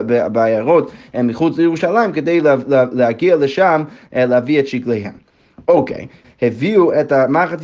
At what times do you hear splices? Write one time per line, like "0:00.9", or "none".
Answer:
0:06.2